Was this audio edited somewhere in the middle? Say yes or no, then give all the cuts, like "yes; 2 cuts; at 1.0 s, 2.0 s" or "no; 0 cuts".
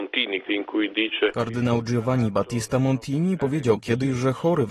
yes; 1 cut; at 3.4 s